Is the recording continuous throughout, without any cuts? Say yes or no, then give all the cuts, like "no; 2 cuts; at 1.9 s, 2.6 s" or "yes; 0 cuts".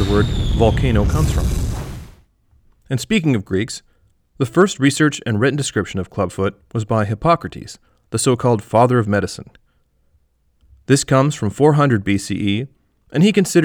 yes; 0 cuts